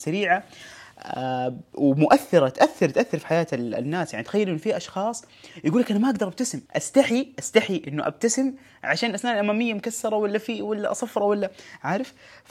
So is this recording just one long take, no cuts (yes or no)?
no